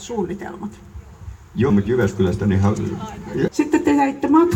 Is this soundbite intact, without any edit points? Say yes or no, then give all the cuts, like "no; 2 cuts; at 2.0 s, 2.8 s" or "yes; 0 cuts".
no; 2 cuts; at 1.7 s, 3.5 s